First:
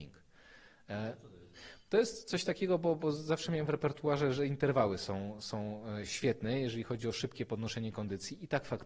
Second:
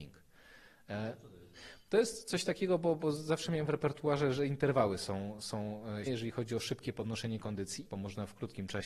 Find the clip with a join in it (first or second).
second